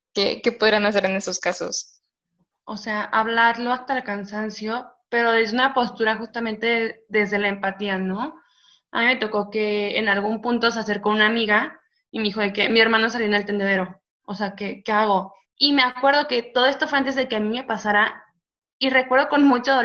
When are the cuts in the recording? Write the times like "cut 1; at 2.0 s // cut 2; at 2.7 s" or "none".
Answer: cut 1; at 2.4 s // cut 2; at 15.4 s